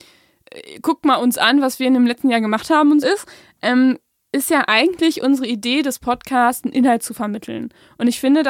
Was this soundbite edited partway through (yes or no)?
yes